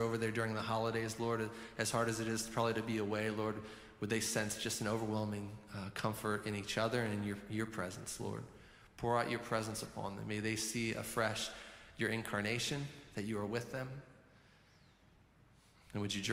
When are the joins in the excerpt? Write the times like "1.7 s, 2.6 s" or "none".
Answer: none